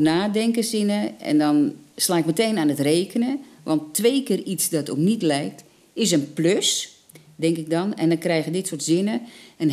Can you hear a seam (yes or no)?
no